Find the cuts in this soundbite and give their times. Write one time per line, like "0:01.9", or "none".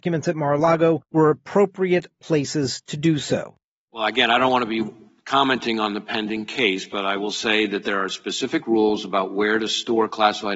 none